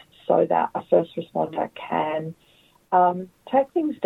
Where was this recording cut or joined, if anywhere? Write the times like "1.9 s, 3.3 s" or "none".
none

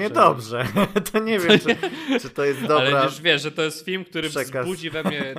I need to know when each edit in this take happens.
none

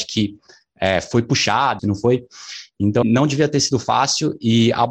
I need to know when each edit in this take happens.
1.8 s, 3.0 s

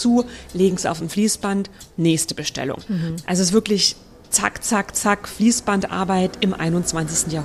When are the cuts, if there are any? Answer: none

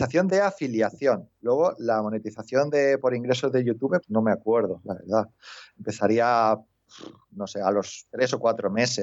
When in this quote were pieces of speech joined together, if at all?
4.0 s

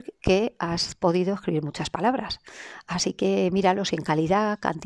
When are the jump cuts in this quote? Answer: none

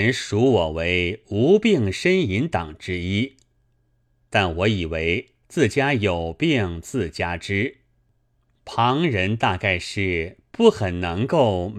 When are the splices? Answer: 5.4 s

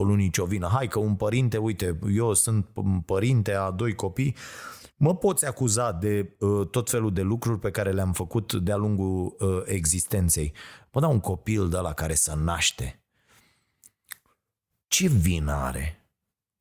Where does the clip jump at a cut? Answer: 10.9 s

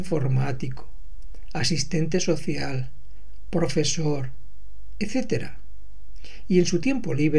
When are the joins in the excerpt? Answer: none

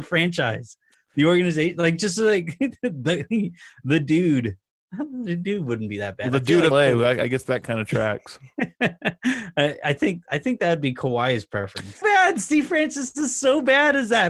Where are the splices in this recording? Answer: 6.7 s, 12.0 s

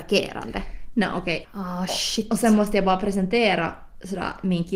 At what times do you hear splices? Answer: 1.4 s

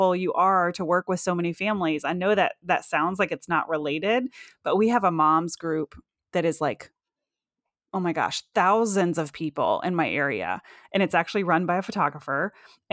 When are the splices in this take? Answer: none

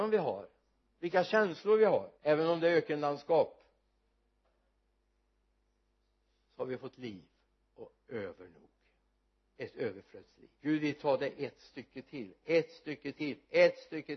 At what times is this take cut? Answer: 2.1 s, 10.5 s

